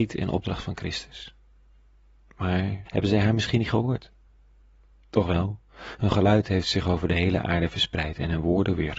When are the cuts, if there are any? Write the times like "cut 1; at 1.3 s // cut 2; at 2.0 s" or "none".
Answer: cut 1; at 2.8 s

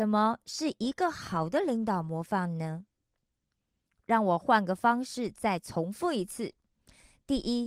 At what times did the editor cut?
none

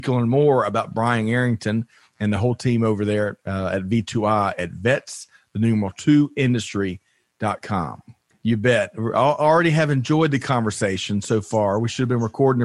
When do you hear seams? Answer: cut 1; at 8.3 s

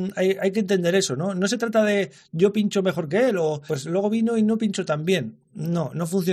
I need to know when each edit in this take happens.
cut 1; at 3.7 s

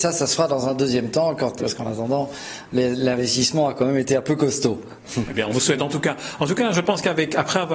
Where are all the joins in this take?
cut 1; at 1.6 s

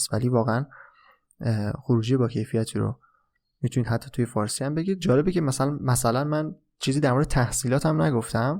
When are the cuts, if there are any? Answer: none

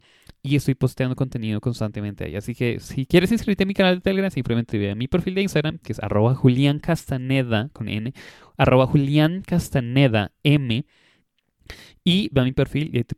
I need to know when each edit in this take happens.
none

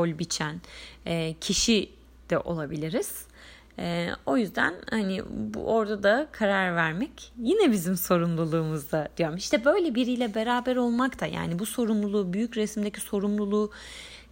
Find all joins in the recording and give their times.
none

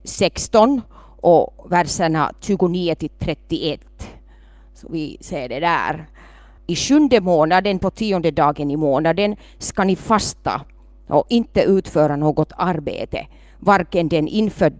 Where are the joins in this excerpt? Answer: cut 1; at 6.6 s

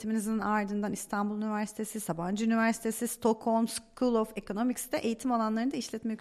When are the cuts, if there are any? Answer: none

